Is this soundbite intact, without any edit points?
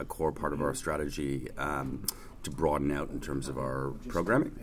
yes; 0 cuts

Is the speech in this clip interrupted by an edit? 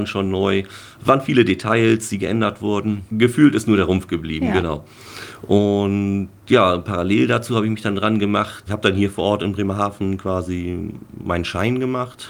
yes; 1 cut; at 3.1 s

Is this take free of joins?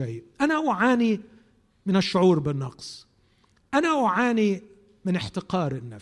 yes; 0 cuts

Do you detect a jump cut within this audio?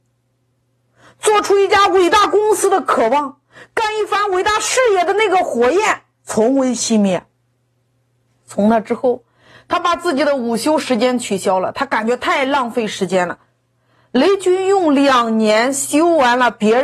yes; 1 cut; at 8.3 s

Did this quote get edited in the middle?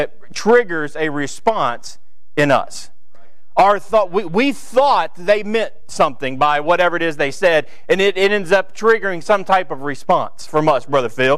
no; 0 cuts

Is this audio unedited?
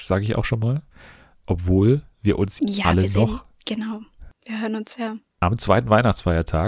no; 1 cut; at 2.6 s

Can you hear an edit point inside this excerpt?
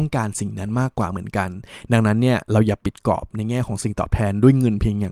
no; 0 cuts

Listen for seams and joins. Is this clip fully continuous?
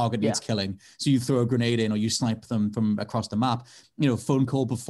no; 1 cut; at 3.8 s

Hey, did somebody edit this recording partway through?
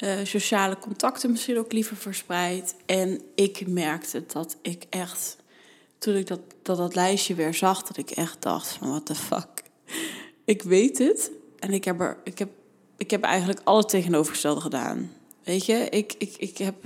no; 0 cuts

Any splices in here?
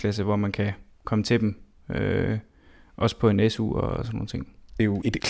no; 0 cuts

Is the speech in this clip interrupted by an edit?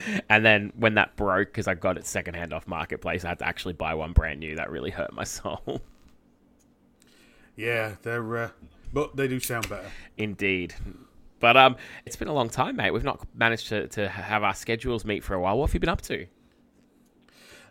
yes; 2 cuts; at 8.8 s, 12.1 s

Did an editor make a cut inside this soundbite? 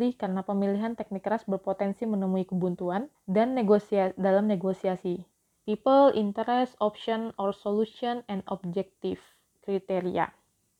yes; 2 cuts; at 3.1 s, 5.6 s

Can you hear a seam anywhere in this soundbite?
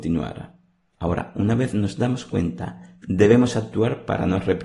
yes; 1 cut; at 0.9 s

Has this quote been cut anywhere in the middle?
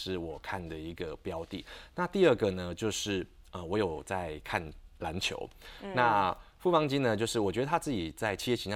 no; 0 cuts

